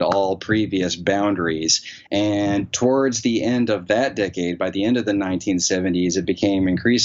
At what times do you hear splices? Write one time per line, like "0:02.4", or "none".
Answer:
0:02.1